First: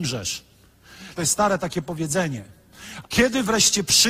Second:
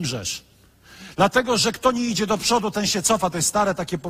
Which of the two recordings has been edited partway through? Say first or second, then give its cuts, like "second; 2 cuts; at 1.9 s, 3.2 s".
first; 2 cuts; at 1.2 s, 3.0 s